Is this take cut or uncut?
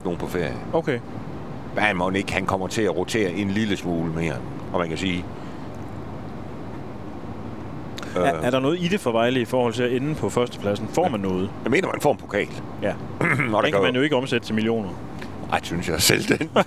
cut